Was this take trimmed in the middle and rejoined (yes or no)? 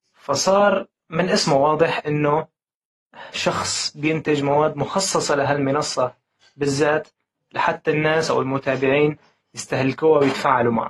no